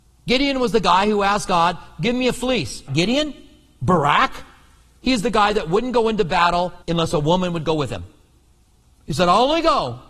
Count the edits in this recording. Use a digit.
2